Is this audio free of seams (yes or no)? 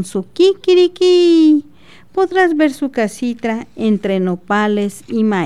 yes